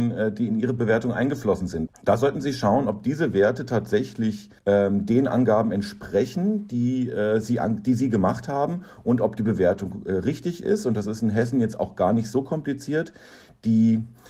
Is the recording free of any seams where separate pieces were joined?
no; 2 cuts; at 1.9 s, 4.6 s

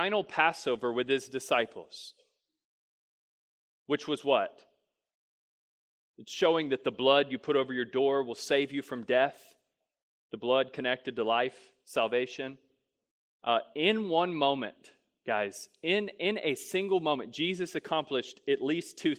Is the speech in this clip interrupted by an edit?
yes; 1 cut; at 13.3 s

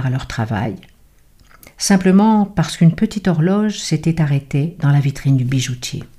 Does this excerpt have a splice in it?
no; 0 cuts

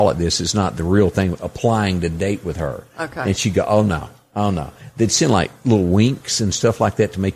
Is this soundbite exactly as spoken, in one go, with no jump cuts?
yes; 0 cuts

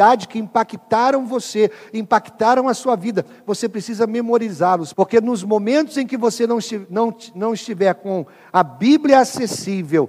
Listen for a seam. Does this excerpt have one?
yes; 1 cut; at 4.9 s

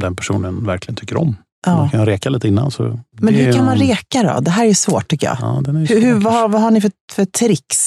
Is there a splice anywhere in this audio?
no; 0 cuts

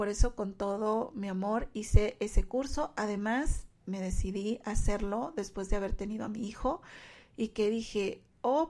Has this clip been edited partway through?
no; 0 cuts

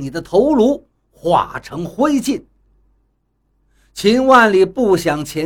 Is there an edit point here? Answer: no; 0 cuts

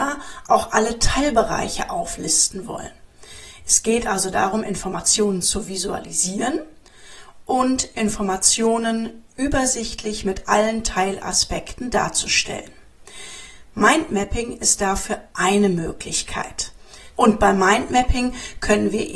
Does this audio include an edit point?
yes; 1 cut; at 17.1 s

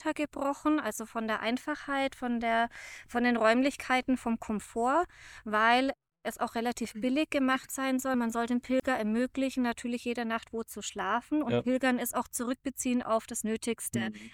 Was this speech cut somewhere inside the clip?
no; 0 cuts

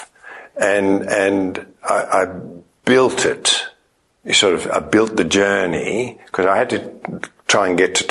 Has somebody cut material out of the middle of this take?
no; 0 cuts

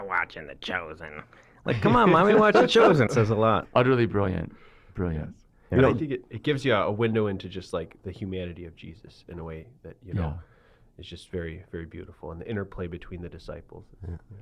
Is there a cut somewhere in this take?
yes; 1 cut; at 3.1 s

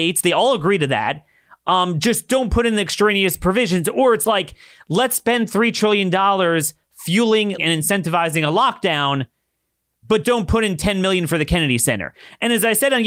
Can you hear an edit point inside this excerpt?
yes; 2 cuts; at 7.6 s, 10.2 s

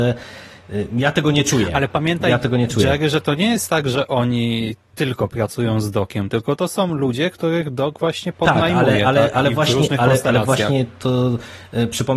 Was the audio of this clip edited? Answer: no; 0 cuts

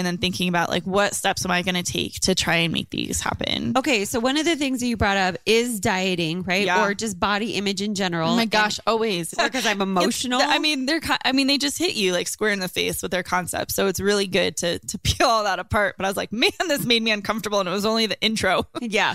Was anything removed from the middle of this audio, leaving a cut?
yes; 1 cut; at 9.3 s

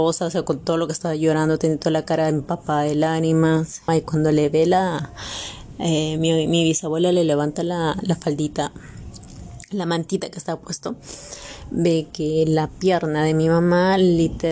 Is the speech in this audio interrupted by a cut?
yes; 1 cut; at 3.9 s

